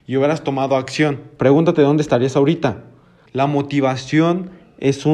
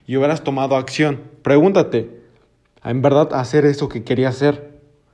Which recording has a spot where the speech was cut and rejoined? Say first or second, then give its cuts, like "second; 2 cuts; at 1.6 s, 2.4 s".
first; 2 cuts; at 1.4 s, 3.3 s